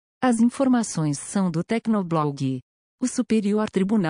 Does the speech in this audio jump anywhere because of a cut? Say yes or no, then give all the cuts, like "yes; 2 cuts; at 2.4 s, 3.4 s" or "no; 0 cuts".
yes; 1 cut; at 2.9 s